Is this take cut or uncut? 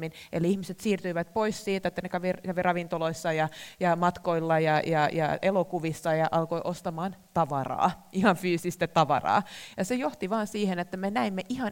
uncut